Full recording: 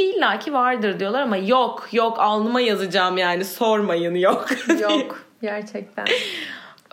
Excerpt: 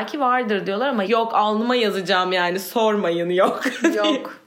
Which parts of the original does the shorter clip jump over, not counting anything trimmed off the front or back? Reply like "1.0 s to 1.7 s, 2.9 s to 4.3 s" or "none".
1.4 s to 1.9 s